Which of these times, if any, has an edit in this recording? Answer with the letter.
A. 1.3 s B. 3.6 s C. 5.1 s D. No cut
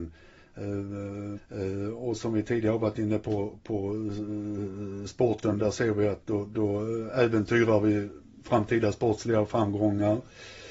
A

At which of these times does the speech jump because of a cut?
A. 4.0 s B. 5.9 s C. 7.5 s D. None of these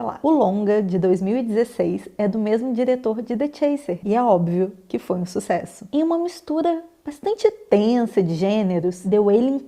A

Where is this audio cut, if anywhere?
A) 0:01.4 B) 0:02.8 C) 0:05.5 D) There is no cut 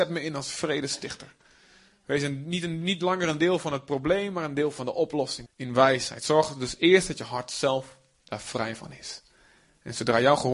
C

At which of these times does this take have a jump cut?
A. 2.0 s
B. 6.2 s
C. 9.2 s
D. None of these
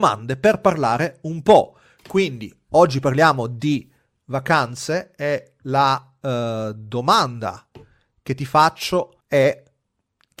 C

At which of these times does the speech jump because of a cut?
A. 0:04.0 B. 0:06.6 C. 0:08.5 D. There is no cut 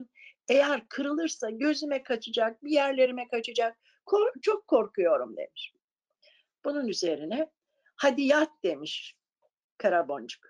D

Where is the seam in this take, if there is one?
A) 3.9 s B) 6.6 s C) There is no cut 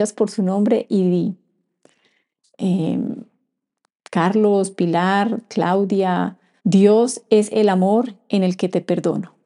B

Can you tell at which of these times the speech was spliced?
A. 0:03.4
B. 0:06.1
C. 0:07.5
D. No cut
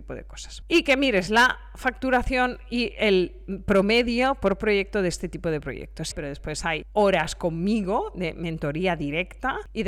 B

